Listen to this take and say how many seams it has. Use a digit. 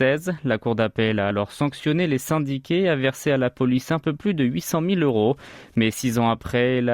0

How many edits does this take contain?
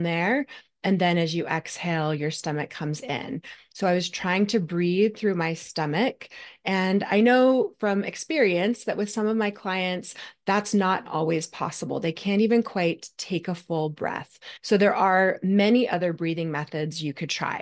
1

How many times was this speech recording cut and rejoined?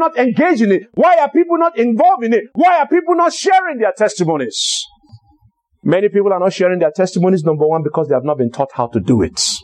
0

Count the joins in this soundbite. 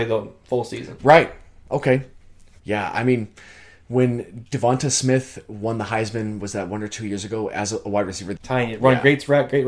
2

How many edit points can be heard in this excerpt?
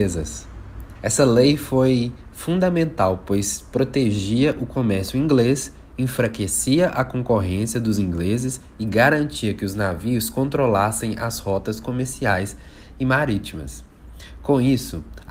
1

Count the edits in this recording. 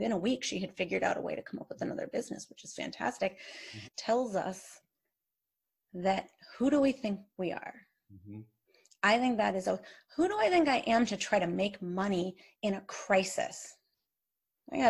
2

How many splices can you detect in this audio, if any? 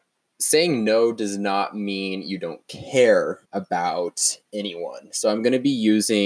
1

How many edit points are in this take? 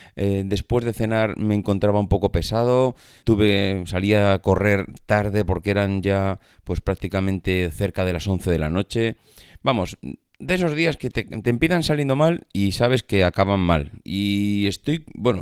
1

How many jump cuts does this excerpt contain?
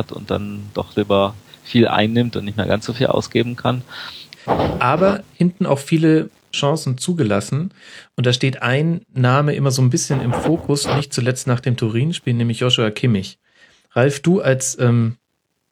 1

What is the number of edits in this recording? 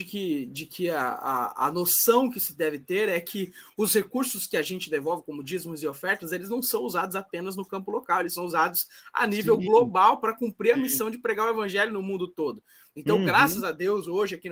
0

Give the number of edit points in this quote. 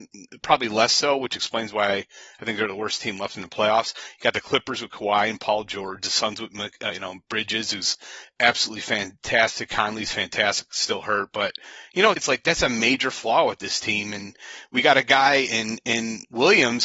2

